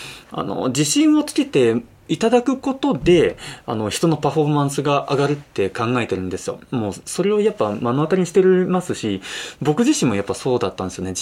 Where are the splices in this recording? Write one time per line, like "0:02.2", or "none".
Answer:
0:05.5